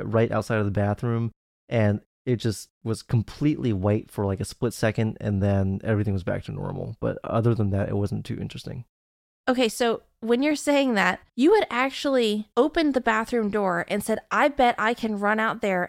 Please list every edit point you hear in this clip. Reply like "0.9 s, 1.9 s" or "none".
11.3 s, 12.5 s